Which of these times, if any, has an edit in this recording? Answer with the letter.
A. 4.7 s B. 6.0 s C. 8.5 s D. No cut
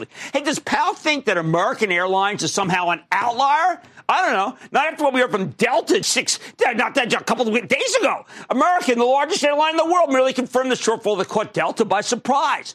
B